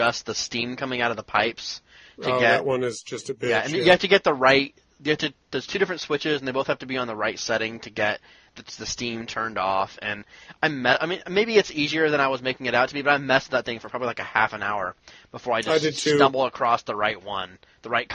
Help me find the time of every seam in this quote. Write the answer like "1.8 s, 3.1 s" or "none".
none